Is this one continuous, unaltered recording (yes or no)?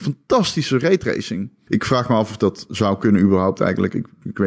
no